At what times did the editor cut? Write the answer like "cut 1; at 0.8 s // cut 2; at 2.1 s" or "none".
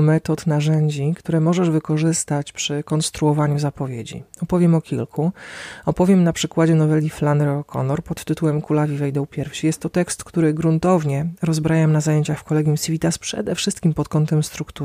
none